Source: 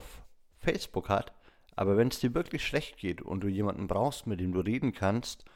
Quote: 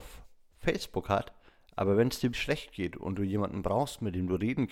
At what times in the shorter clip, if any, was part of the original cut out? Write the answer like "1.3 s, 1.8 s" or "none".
2.3 s